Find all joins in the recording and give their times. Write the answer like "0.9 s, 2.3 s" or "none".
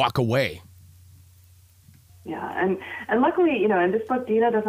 2.1 s